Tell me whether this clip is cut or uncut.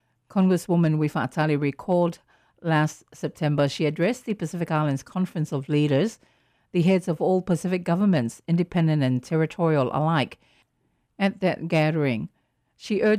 uncut